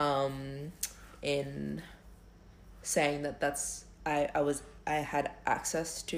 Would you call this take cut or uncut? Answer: uncut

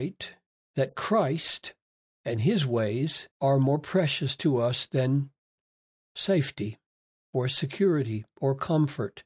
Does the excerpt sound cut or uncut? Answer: cut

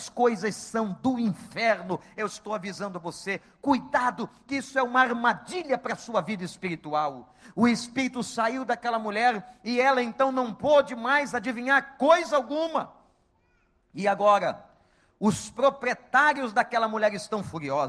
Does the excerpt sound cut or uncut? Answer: uncut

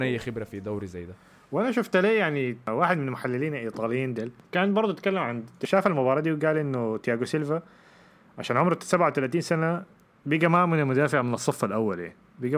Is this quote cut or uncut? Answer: uncut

